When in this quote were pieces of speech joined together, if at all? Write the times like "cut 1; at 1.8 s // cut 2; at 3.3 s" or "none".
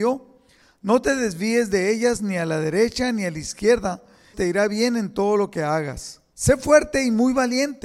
cut 1; at 4.3 s // cut 2; at 6.3 s